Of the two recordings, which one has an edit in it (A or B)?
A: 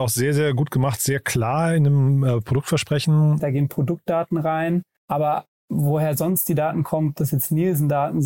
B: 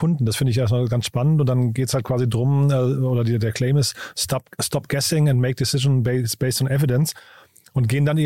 A